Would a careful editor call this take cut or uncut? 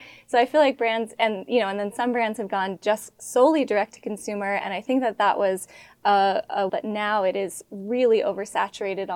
cut